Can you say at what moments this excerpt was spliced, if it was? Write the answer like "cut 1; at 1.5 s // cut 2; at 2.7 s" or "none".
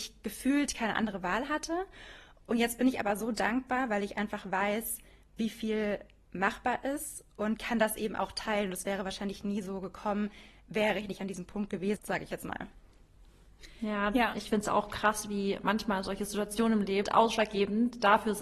cut 1; at 12.0 s // cut 2; at 17.0 s